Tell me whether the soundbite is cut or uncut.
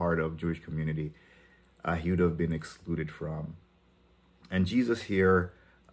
uncut